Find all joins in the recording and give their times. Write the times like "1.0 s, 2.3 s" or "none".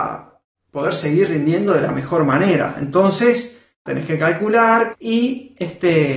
3.9 s, 4.9 s

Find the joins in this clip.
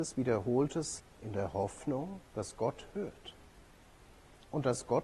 1.0 s, 2.3 s

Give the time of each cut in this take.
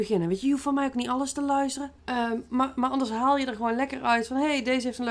2.0 s

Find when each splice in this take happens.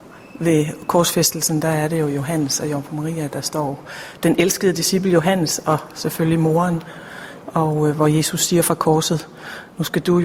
7.4 s

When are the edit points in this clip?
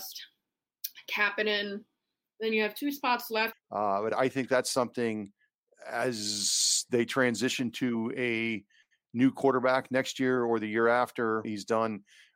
3.5 s, 11.4 s

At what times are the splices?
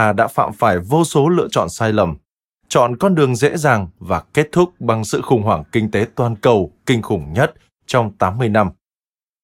none

